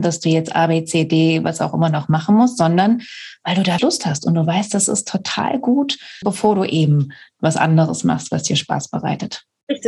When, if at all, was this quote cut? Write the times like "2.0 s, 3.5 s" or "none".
3.8 s, 6.2 s